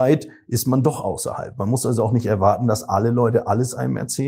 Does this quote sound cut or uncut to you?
uncut